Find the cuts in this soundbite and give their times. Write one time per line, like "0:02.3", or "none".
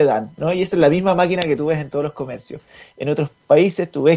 none